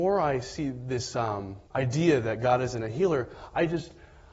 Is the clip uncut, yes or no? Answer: no